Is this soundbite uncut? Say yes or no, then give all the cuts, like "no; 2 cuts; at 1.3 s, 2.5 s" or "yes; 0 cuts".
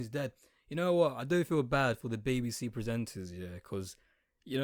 yes; 0 cuts